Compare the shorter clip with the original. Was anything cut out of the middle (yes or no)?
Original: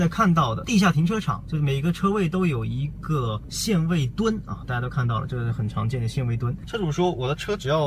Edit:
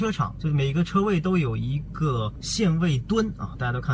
no